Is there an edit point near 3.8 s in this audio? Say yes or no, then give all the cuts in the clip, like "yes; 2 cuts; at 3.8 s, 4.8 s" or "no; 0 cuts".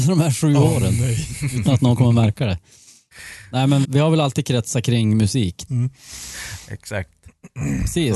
yes; 2 cuts; at 3.8 s, 5.7 s